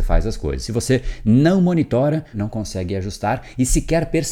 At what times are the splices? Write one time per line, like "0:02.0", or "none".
0:02.3

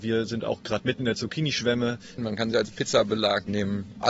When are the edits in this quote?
0:02.2

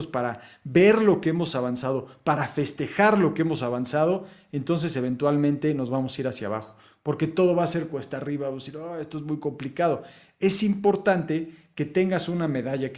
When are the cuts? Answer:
none

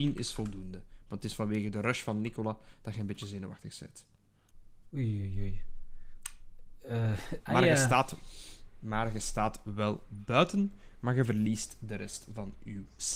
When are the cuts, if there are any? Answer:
0:07.4

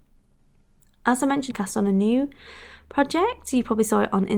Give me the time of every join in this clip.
0:01.5

